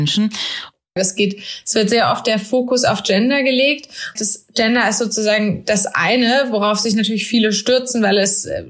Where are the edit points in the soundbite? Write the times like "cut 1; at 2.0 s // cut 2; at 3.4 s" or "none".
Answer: cut 1; at 1.0 s // cut 2; at 4.2 s